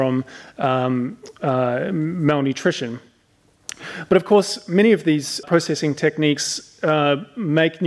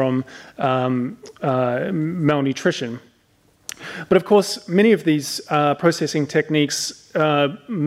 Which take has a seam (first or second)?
first